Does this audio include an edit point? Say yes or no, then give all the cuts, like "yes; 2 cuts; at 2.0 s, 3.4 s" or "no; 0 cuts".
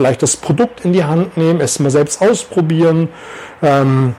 no; 0 cuts